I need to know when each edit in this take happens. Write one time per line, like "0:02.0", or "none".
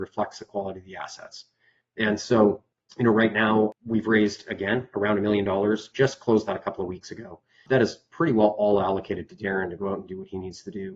0:05.9